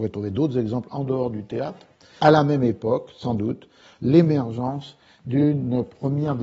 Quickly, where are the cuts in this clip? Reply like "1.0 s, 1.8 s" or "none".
2.2 s